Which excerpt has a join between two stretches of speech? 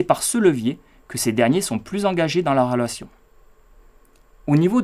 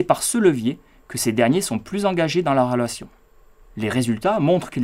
second; 1 cut; at 3.6 s

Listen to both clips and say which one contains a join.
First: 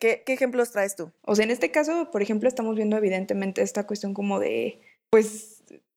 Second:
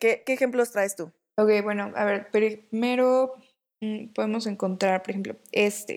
first; 1 cut; at 1.2 s

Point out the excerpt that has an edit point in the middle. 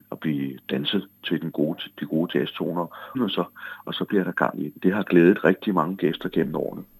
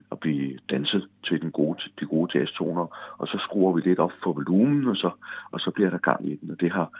first; 2 cuts; at 3.1 s, 4.8 s

